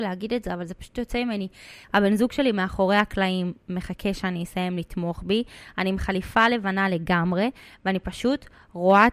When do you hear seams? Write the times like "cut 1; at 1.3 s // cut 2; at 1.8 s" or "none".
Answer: cut 1; at 1.8 s